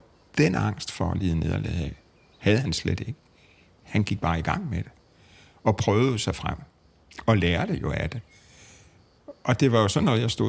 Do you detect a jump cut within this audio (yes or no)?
no